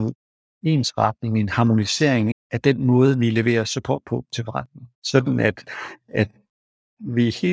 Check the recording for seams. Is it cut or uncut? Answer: cut